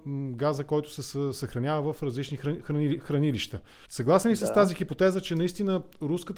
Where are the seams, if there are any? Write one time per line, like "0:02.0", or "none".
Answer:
0:03.8